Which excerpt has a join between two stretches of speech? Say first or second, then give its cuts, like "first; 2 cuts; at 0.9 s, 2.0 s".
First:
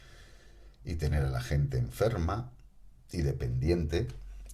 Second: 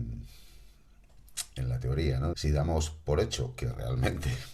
second; 1 cut; at 2.3 s